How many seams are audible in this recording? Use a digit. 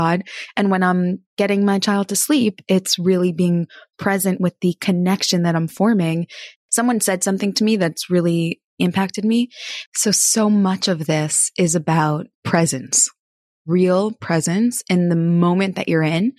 2